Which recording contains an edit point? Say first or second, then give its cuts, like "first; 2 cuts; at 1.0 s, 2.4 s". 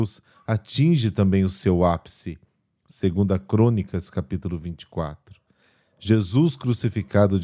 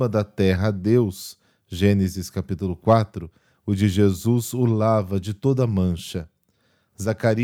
first; 1 cut; at 2.8 s